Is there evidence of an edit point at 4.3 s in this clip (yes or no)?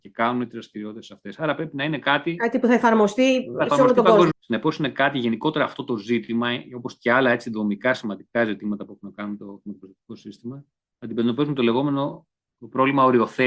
yes